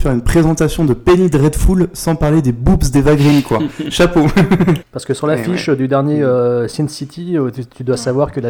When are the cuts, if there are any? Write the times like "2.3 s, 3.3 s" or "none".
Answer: 4.8 s